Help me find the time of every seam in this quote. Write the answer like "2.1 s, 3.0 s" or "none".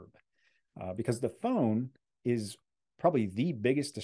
none